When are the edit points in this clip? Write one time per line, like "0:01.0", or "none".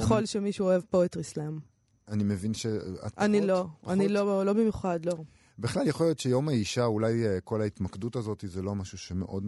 none